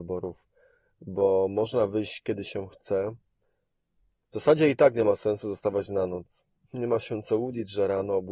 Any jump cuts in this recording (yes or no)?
no